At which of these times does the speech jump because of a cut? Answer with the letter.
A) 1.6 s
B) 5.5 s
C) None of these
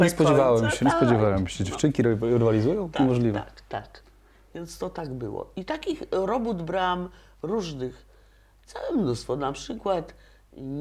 C